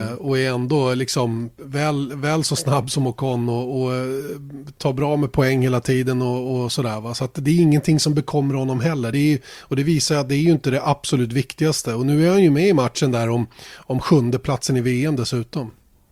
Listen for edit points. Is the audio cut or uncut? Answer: uncut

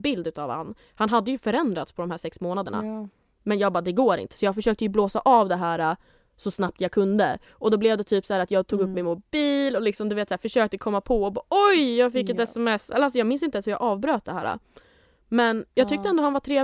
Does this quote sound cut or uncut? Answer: uncut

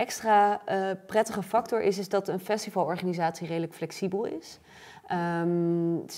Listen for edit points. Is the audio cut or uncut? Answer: uncut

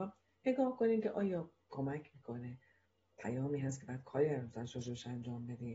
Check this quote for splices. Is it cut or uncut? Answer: uncut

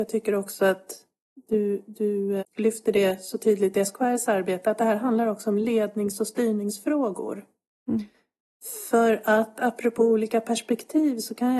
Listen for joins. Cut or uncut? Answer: cut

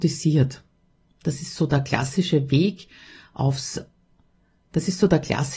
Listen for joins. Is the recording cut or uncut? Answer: uncut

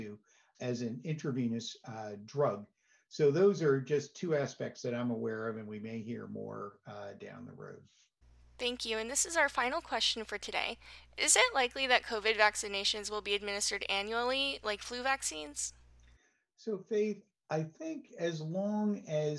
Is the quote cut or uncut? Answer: uncut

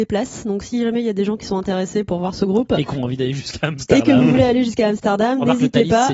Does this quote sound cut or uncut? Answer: uncut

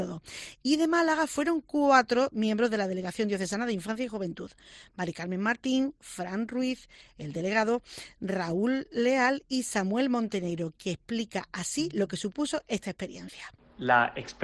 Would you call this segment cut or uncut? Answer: uncut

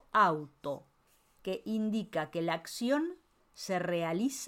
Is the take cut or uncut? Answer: uncut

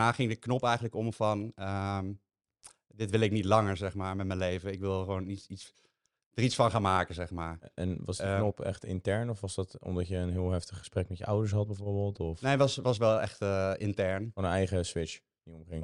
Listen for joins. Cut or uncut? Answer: uncut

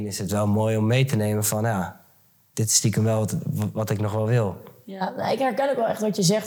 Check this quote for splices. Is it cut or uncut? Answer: uncut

